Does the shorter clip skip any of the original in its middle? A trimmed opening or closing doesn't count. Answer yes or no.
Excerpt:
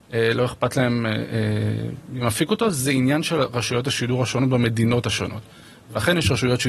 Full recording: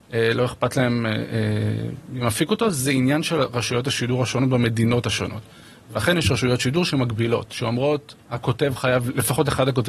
no